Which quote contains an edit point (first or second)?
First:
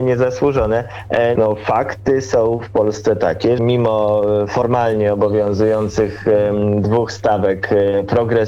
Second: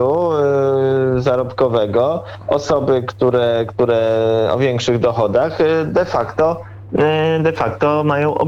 first